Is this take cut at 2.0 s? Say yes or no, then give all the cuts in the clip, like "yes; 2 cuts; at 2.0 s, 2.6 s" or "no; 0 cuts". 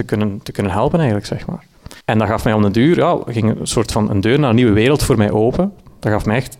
yes; 1 cut; at 2.0 s